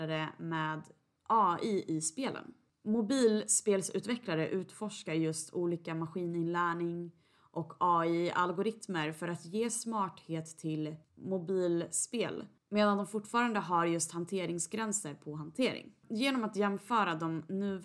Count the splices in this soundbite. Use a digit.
1